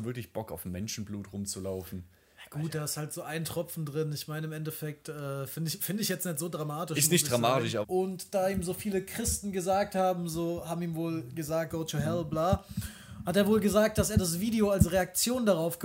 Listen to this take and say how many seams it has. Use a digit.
2